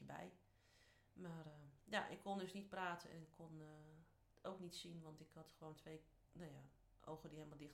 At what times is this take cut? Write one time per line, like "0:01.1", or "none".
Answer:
none